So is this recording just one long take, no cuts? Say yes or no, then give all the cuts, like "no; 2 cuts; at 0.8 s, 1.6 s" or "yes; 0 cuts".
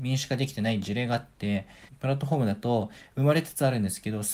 no; 1 cut; at 1.9 s